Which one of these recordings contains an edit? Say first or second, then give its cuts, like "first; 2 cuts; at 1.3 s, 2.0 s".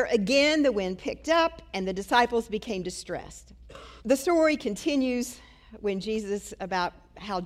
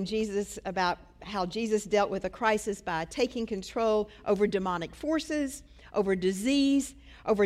first; 1 cut; at 4.0 s